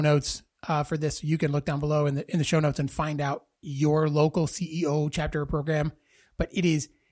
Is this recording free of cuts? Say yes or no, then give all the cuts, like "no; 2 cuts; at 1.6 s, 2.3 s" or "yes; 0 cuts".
yes; 0 cuts